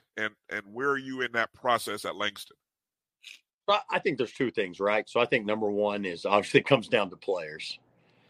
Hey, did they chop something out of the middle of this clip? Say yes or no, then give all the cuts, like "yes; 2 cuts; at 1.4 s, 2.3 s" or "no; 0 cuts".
no; 0 cuts